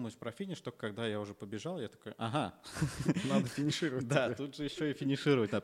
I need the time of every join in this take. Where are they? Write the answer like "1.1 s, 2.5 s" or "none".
none